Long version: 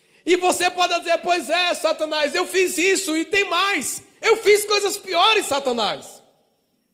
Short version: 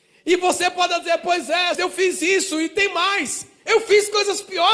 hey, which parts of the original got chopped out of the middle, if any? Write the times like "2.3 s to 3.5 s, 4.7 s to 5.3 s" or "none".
1.7 s to 2.3 s